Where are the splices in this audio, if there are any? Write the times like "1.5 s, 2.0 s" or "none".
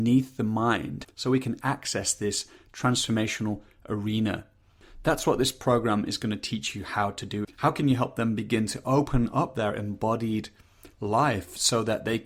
1.0 s, 7.4 s